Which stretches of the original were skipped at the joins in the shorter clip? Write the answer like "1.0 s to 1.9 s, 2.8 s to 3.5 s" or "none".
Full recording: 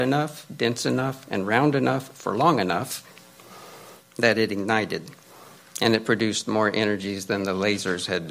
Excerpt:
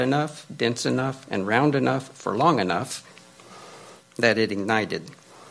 none